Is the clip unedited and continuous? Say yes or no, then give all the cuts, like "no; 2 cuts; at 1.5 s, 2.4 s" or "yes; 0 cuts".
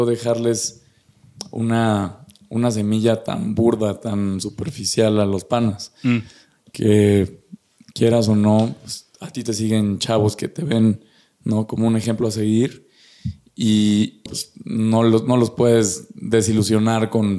no; 1 cut; at 14.3 s